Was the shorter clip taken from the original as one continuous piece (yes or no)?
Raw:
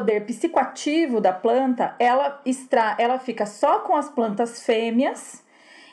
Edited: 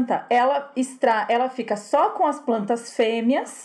yes